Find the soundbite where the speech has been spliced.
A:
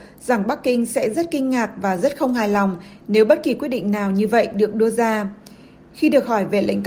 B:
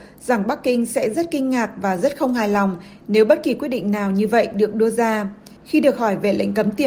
B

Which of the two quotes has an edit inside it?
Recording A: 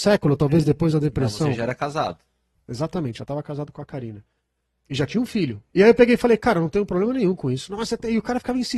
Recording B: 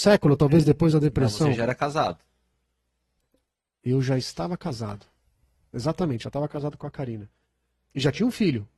A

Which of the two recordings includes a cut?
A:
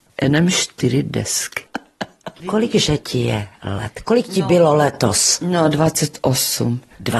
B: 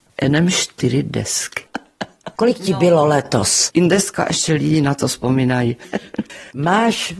B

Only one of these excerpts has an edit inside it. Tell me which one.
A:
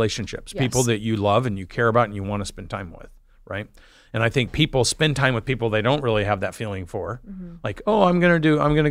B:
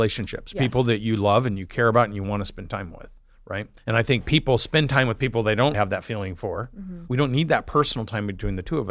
B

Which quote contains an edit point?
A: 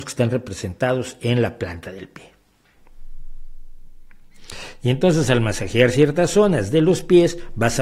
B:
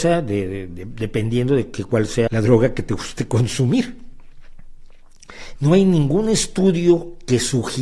B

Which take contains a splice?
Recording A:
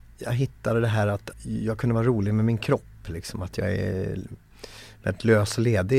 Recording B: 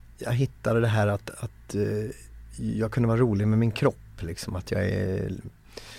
A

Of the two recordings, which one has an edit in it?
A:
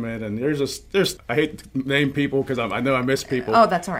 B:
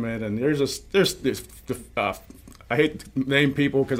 A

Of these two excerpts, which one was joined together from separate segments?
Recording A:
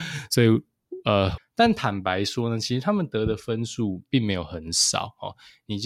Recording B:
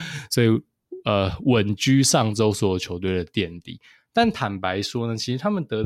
A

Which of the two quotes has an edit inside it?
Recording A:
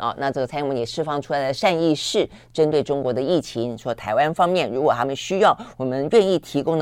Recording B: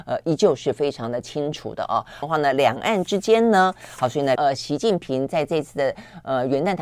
B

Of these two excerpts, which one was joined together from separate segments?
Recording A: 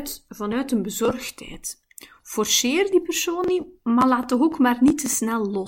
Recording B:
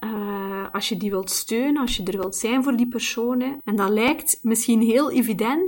B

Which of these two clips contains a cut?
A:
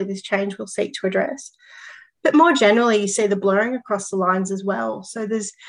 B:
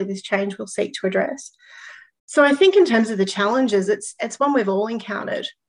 B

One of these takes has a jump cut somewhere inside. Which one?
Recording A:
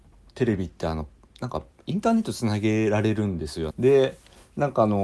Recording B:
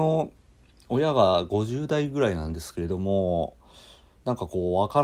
A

